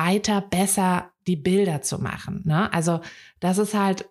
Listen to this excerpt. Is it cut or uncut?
uncut